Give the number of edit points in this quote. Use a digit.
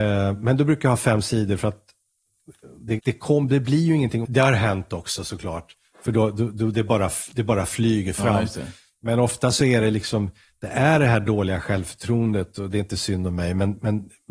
2